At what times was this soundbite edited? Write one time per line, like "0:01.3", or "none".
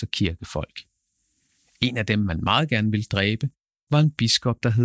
none